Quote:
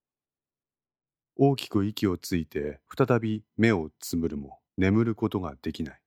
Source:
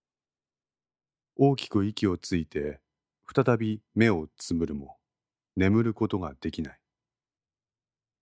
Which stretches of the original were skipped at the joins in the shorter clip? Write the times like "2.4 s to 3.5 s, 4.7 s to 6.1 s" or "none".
2.9 s to 3.2 s, 5.0 s to 5.5 s